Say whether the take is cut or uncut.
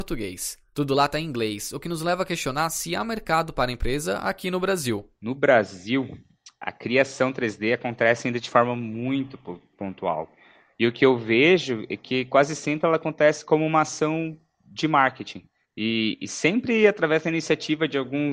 uncut